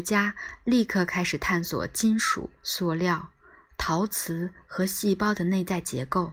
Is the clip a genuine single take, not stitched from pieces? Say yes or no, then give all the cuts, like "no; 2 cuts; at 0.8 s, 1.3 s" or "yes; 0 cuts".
no; 1 cut; at 2.6 s